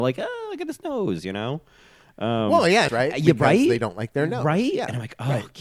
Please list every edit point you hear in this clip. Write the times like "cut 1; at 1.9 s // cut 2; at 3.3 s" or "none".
cut 1; at 2.9 s

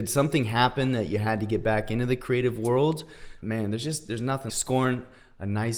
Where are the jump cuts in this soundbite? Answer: cut 1; at 3.4 s // cut 2; at 4.5 s

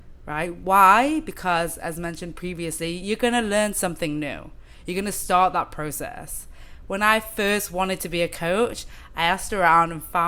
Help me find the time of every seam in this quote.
none

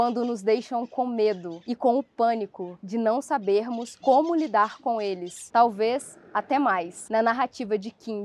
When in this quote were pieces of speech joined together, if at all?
cut 1; at 5.5 s // cut 2; at 7.1 s

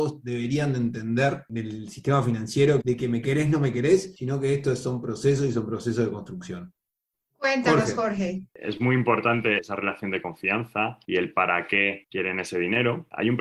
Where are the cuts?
cut 1; at 2.8 s

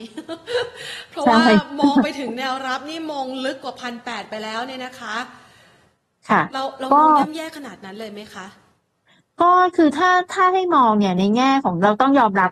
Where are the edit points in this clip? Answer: none

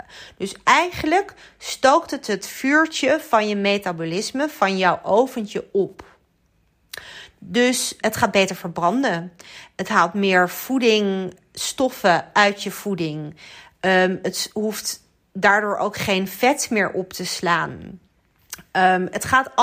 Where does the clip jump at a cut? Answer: cut 1; at 8.0 s

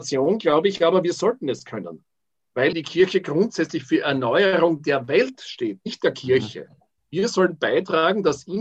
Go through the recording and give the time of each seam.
cut 1; at 2.7 s // cut 2; at 7.0 s

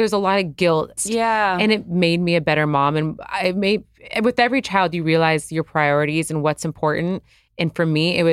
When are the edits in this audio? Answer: cut 1; at 1.0 s

